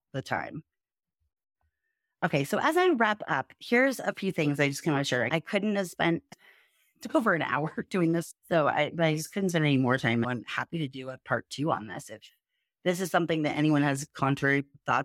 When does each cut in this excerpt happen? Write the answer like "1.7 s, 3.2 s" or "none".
5.3 s, 10.2 s